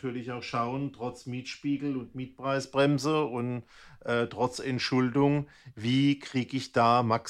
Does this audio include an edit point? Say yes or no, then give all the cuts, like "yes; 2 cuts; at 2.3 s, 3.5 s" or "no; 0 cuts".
no; 0 cuts